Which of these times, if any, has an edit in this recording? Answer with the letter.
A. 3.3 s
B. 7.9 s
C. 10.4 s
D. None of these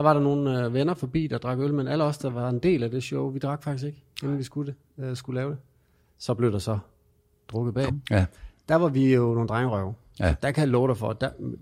B